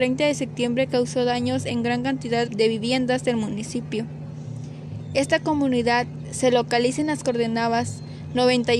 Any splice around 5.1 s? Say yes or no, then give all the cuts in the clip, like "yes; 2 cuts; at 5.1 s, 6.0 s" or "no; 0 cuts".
no; 1 cut; at 2.5 s